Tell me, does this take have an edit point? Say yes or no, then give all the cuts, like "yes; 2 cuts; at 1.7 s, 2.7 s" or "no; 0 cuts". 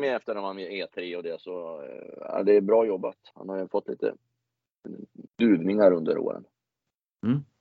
yes; 2 cuts; at 3.3 s, 5.3 s